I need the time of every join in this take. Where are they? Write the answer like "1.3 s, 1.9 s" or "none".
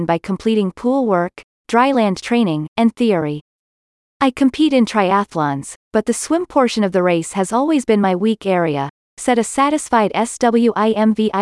4.0 s

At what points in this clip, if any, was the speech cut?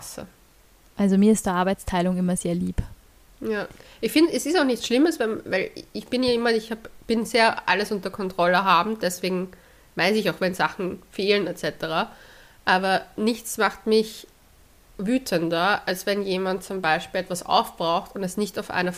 none

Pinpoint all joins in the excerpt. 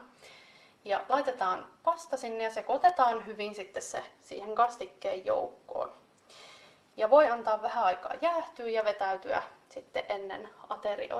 none

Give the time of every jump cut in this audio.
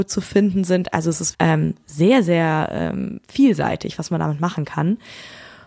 1.3 s

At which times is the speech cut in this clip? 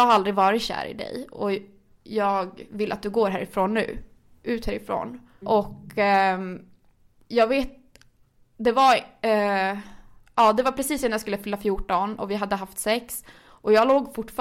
5.4 s

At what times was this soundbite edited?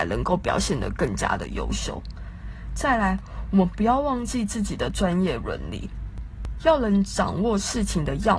6.6 s

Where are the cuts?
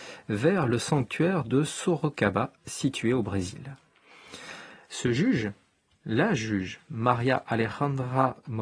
4.9 s

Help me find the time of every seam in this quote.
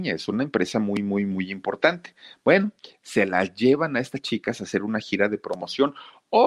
none

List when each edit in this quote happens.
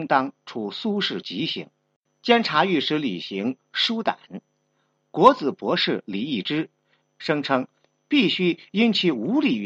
2.1 s, 7.0 s

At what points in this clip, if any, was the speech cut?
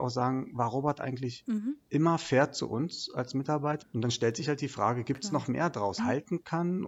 3.8 s, 6.0 s

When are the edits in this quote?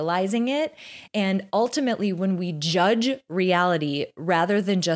none

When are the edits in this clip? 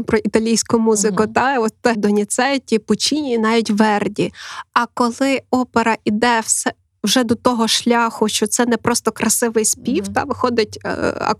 1.9 s

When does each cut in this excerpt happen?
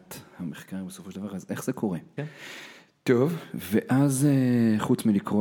2.2 s

